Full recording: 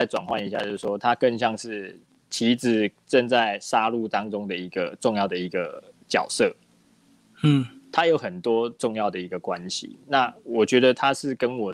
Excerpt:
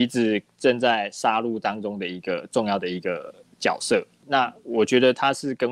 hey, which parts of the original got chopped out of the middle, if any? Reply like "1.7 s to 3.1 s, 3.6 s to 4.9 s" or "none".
6.7 s to 10.0 s